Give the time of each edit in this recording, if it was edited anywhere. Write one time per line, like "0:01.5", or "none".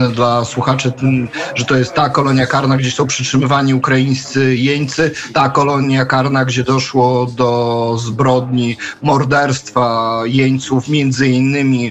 none